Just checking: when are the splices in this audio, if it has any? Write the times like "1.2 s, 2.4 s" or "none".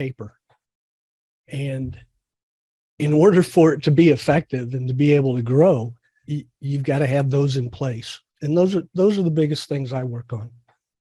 6.2 s, 8.3 s